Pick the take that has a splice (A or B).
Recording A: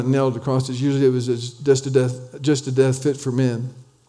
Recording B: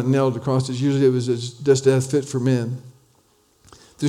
B